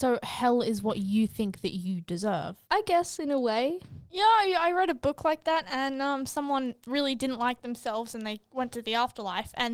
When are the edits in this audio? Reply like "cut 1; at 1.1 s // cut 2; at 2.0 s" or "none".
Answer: cut 1; at 2.6 s